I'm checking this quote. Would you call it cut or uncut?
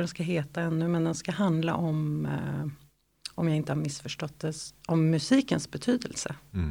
uncut